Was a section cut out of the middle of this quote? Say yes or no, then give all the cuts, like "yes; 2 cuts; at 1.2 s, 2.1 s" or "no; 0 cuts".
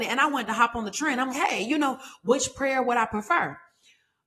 yes; 1 cut; at 1.3 s